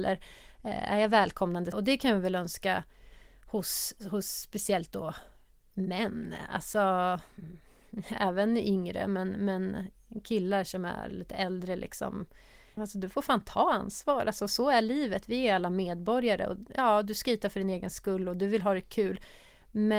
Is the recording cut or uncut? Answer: cut